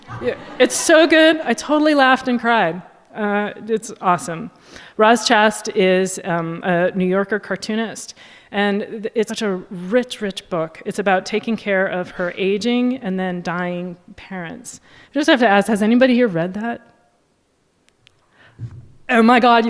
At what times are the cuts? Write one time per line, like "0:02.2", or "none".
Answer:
0:09.3
0:15.0